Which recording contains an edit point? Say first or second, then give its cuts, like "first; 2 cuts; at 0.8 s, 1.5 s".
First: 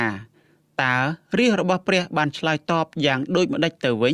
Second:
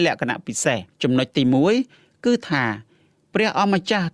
second; 1 cut; at 0.9 s